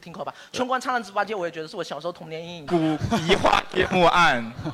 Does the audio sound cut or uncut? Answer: cut